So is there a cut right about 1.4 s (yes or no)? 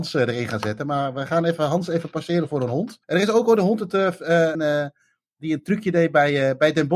no